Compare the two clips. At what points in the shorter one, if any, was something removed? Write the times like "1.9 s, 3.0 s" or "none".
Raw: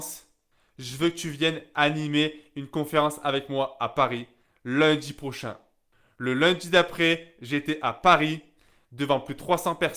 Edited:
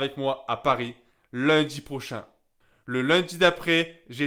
none